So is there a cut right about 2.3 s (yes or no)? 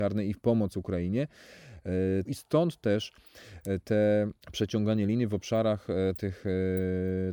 yes